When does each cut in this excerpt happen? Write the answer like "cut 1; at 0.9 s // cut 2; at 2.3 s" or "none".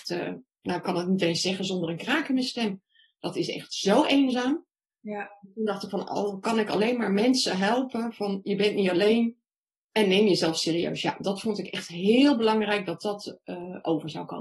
none